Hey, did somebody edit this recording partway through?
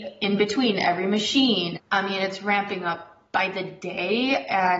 yes; 1 cut; at 1.8 s

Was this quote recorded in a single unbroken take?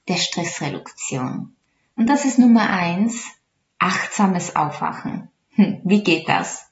yes; 0 cuts

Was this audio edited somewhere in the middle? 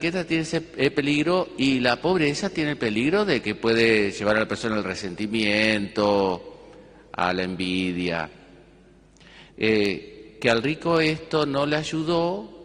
yes; 1 cut; at 9.5 s

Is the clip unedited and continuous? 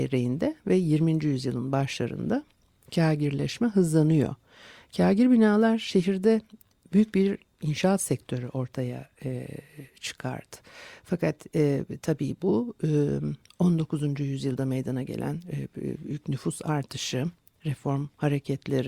yes; 0 cuts

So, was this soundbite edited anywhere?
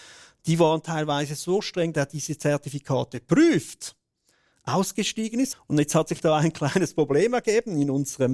yes; 2 cuts; at 1.9 s, 5.5 s

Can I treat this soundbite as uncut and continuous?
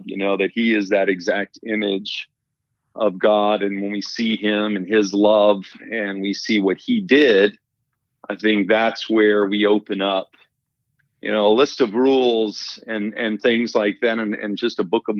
yes; 0 cuts

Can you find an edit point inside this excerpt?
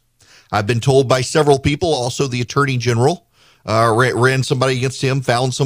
no; 0 cuts

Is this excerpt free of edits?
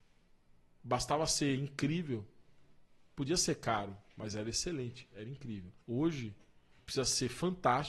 no; 1 cut; at 5.8 s

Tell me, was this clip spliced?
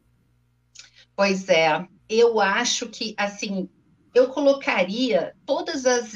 yes; 1 cut; at 2.0 s

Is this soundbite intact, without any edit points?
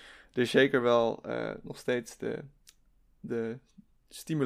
yes; 0 cuts

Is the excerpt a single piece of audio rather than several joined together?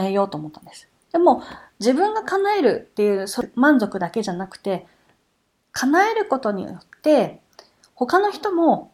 yes; 0 cuts

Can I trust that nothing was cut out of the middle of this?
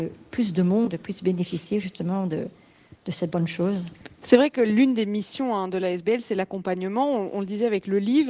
yes; 0 cuts

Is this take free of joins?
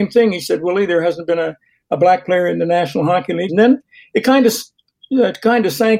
no; 1 cut; at 3.5 s

